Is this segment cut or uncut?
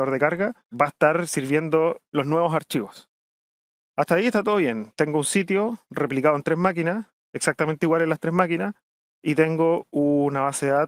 uncut